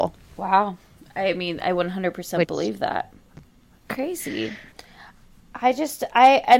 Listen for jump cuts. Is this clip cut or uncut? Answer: cut